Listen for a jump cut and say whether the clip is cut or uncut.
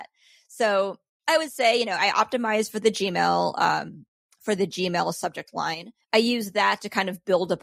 cut